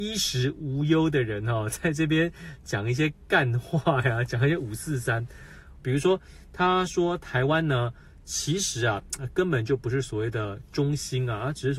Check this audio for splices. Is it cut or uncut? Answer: cut